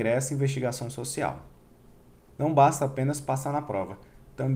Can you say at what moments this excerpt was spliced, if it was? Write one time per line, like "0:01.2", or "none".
0:02.3